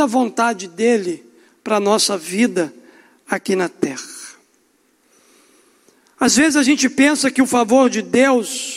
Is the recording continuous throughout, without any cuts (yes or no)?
yes